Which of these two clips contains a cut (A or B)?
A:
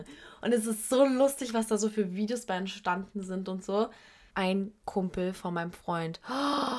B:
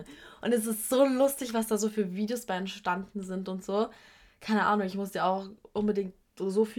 A